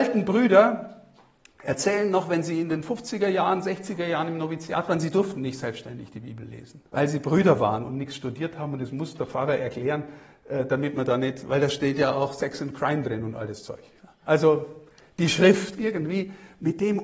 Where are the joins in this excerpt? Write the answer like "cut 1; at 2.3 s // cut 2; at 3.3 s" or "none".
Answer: cut 1; at 6.9 s // cut 2; at 14.2 s // cut 3; at 15.8 s